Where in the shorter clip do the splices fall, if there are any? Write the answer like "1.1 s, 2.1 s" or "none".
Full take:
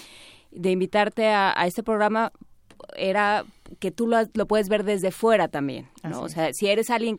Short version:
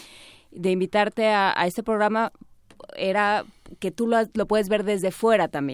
none